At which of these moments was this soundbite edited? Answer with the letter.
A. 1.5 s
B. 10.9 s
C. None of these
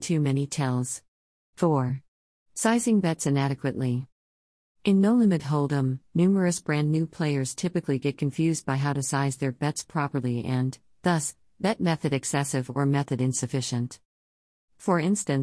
A